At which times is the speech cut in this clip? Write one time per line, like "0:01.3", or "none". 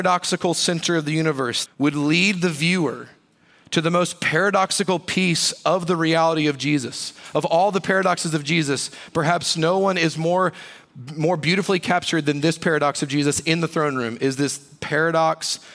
0:01.7